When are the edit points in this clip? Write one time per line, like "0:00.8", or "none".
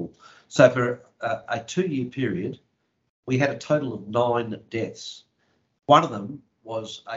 none